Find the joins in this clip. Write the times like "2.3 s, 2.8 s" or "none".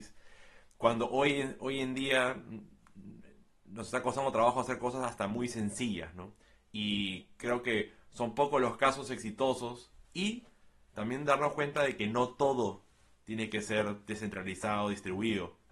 10.0 s